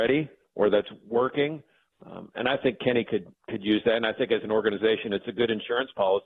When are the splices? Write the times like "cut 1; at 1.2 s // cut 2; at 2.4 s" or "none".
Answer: none